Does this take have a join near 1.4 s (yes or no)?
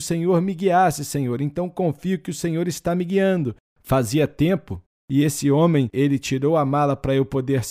no